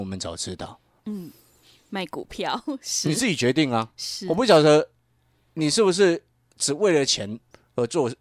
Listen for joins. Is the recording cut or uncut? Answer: cut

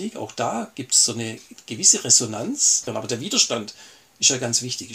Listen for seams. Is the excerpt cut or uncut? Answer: cut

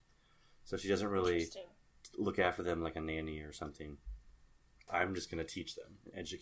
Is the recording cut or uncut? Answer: cut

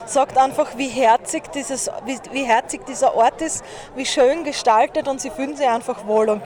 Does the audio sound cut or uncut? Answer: uncut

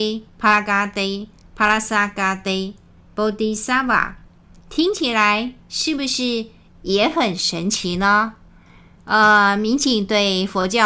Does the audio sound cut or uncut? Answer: cut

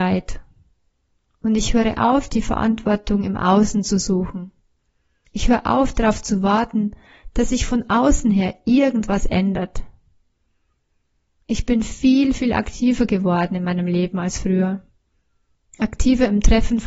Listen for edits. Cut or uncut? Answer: uncut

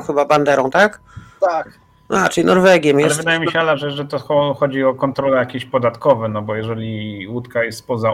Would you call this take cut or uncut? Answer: uncut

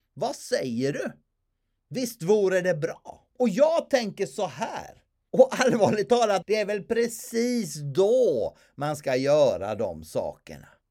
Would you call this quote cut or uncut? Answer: cut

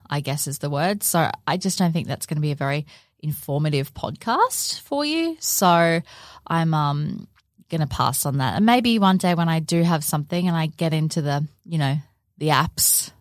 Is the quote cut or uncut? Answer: uncut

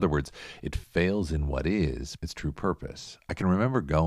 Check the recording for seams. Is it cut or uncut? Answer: cut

